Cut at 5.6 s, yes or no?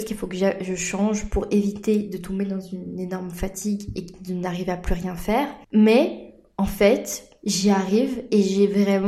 yes